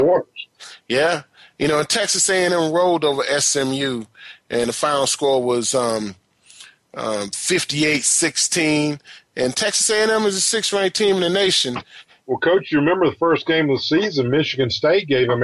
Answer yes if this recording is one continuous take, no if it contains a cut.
no